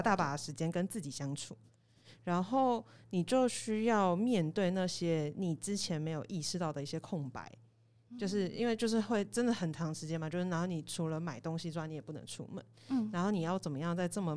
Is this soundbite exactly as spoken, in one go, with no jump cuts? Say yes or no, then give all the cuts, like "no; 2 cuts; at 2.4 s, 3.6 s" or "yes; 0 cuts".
yes; 0 cuts